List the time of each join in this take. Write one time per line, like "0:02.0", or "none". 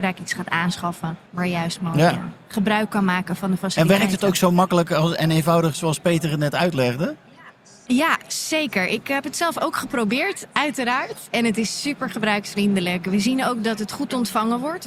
0:01.3